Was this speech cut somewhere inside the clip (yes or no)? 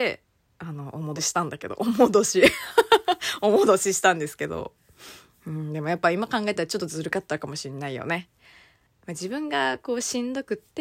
yes